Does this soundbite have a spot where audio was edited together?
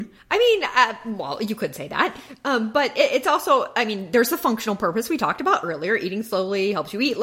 no; 0 cuts

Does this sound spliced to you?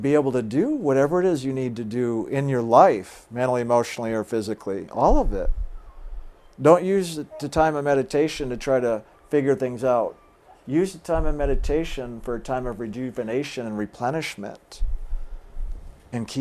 no; 0 cuts

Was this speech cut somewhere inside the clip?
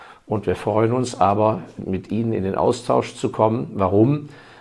no; 0 cuts

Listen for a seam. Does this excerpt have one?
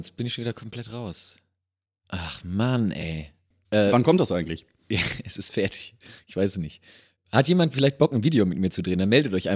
yes; 1 cut; at 3.5 s

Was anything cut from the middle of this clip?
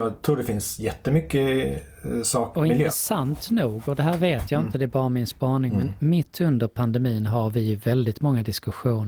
yes; 1 cut; at 2.5 s

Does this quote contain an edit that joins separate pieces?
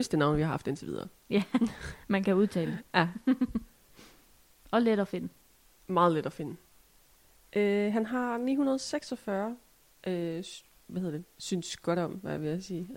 no; 0 cuts

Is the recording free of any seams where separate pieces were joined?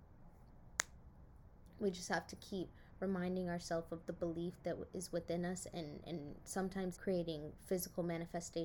no; 1 cut; at 7.0 s

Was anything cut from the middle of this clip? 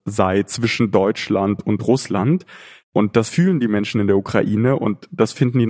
no; 0 cuts

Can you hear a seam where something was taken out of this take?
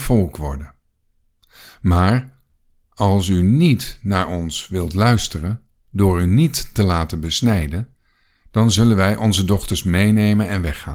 no; 0 cuts

